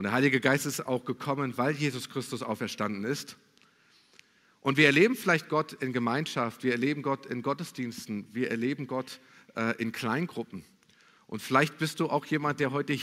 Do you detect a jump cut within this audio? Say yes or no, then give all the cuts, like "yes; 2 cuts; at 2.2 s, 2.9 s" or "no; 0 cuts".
no; 0 cuts